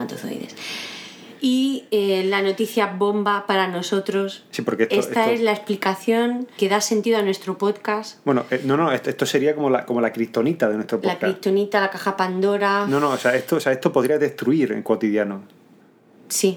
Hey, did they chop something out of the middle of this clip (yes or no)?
yes